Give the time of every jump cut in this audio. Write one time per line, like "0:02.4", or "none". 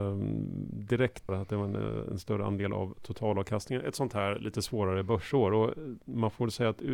0:01.3